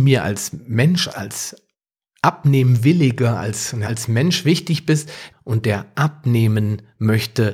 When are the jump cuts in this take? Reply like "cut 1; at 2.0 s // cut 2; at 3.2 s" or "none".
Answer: cut 1; at 1.1 s // cut 2; at 3.8 s // cut 3; at 5.3 s